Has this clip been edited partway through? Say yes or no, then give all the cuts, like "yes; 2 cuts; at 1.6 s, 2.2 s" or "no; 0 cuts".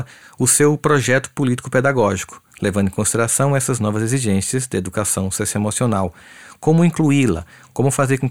no; 0 cuts